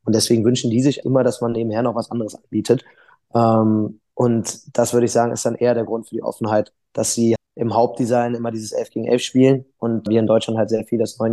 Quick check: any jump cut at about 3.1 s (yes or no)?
no